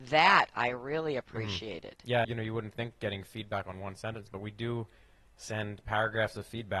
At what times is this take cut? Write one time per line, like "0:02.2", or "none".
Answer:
0:02.2